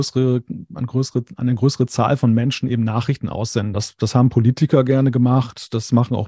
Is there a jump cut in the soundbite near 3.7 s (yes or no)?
no